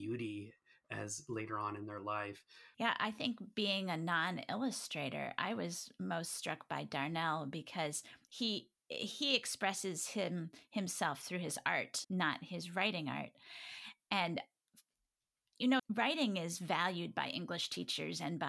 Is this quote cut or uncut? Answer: cut